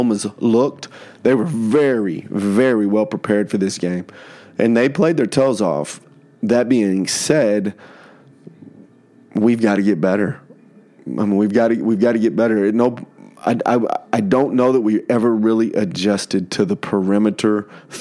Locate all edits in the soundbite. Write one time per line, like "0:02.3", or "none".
none